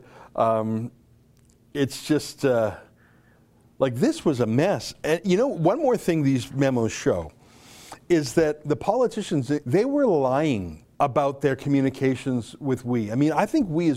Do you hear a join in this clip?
yes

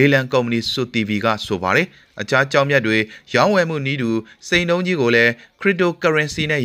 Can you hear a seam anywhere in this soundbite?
no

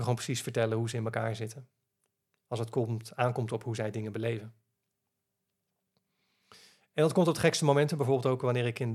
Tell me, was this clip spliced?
no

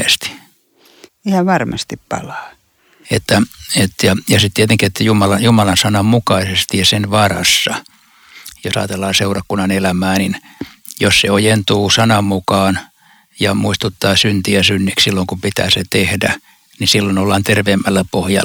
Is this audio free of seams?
no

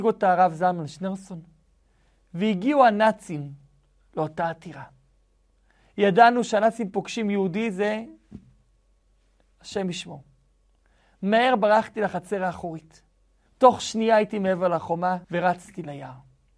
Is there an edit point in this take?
yes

